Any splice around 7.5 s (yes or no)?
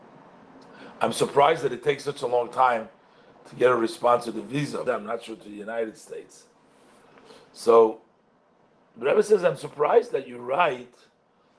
no